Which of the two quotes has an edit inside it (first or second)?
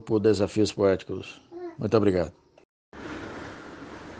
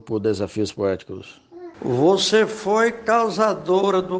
second